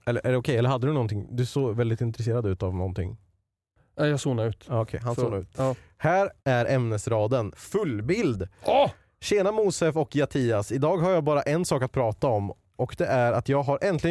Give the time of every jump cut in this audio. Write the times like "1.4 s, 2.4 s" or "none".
6.4 s, 7.5 s